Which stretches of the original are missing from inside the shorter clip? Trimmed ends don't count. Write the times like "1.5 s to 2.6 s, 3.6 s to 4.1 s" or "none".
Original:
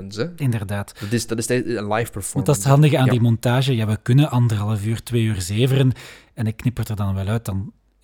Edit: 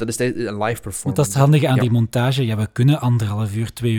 none